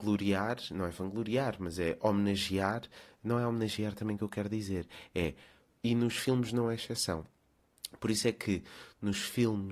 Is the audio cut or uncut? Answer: cut